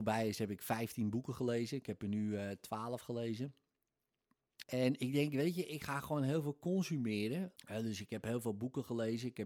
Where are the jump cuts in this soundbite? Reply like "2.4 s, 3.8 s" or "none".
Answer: 4.6 s, 7.6 s